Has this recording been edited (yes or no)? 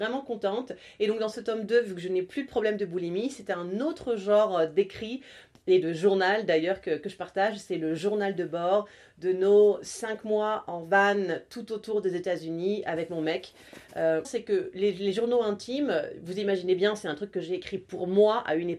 yes